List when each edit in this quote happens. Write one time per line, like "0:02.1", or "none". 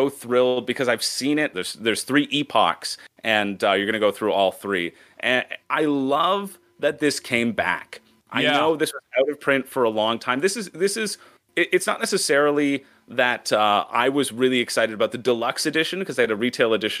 0:01.5
0:05.6